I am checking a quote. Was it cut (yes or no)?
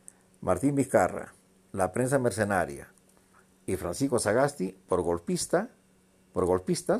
no